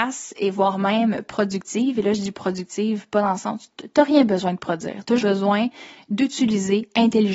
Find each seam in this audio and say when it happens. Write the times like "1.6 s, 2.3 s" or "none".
5.2 s